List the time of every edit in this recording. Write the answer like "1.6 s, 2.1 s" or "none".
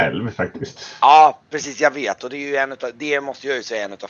none